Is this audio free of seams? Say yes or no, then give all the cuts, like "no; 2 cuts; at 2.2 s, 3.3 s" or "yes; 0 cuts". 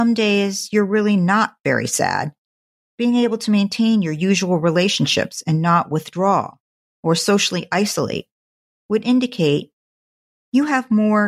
no; 1 cut; at 2.8 s